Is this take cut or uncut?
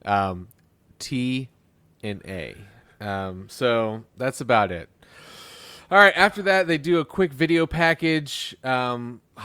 uncut